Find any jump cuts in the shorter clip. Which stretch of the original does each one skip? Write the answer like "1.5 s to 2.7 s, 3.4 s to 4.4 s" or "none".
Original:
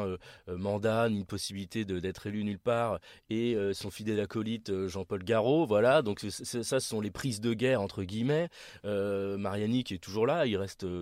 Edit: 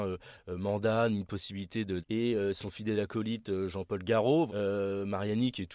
2.0 s to 3.2 s, 5.7 s to 8.8 s